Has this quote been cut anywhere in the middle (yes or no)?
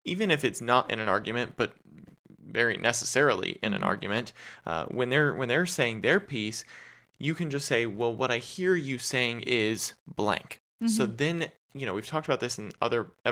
no